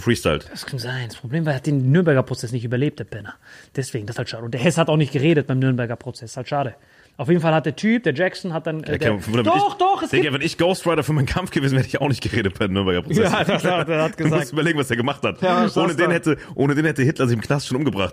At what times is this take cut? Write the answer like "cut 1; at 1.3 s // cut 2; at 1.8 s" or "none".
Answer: none